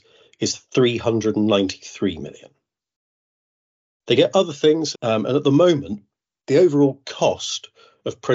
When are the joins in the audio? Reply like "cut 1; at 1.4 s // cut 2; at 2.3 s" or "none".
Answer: cut 1; at 4.9 s